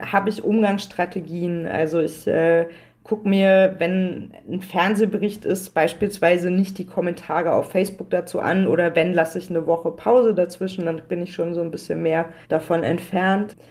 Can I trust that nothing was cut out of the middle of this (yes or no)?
no